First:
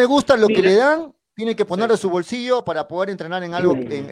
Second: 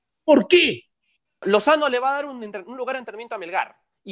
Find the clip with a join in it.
second; 1 cut; at 1.4 s

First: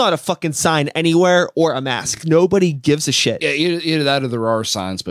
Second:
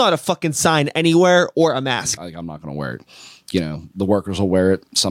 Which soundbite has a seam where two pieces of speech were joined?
second; 1 cut; at 2.2 s

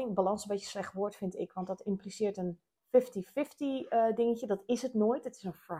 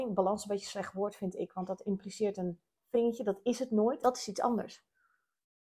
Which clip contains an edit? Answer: second; 2 cuts; at 2.9 s, 4.0 s

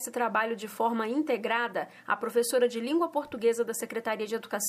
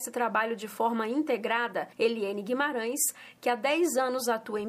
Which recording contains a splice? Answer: second; 1 cut; at 1.9 s

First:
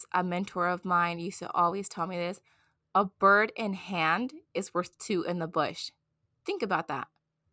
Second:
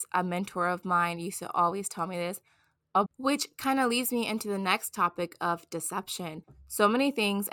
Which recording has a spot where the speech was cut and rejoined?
second; 1 cut; at 3.1 s

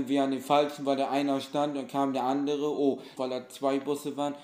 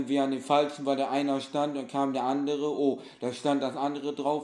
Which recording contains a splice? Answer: first; 1 cut; at 3.2 s

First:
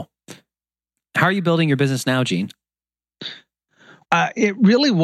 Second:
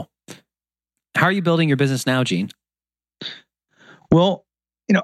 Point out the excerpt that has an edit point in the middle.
first; 1 cut; at 4.0 s

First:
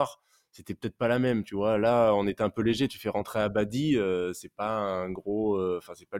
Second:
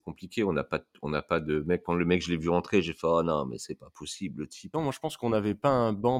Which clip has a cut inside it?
second; 2 cuts; at 1.8 s, 4.7 s

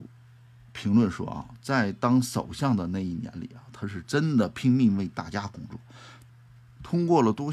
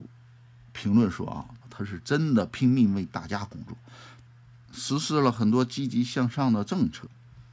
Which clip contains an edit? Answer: second; 2 cuts; at 1.6 s, 4.7 s

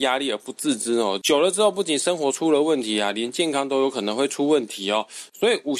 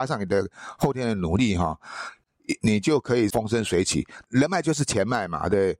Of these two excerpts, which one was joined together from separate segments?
second; 1 cut; at 4.2 s

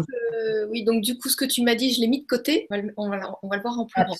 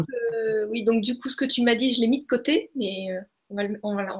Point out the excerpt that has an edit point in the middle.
first; 1 cut; at 2.7 s

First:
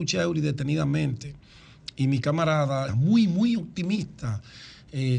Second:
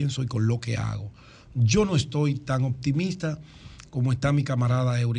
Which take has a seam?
first; 1 cut; at 2.9 s

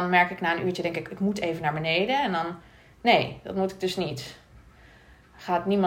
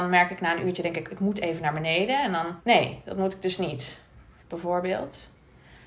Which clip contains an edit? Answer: second; 2 cuts; at 2.6 s, 4.4 s

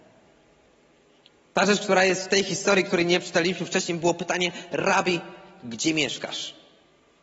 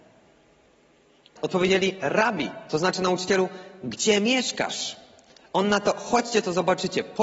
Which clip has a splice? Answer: second; 1 cut; at 1.4 s

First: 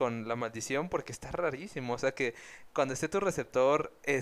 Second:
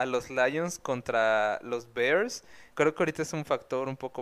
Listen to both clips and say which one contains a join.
second; 1 cut; at 2.7 s

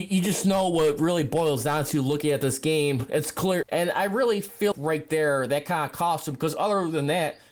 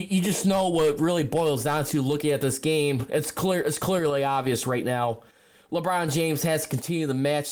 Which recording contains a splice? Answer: first; 2 cuts; at 3.6 s, 4.7 s

